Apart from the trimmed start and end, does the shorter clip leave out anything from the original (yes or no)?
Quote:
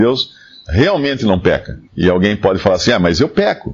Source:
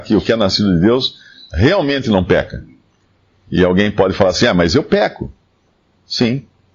yes